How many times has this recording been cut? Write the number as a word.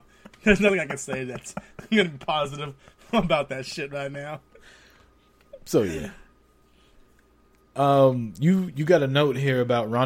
zero